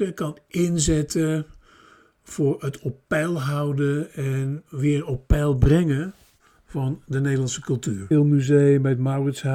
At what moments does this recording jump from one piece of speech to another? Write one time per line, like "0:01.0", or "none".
0:04.7
0:08.1